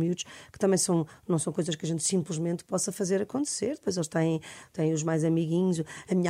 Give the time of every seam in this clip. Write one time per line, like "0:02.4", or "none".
none